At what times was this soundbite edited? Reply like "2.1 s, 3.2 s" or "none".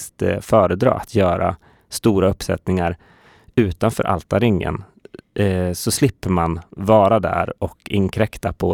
none